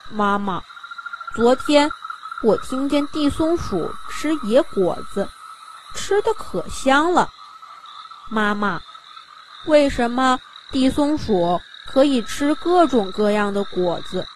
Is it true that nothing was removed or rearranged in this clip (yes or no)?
yes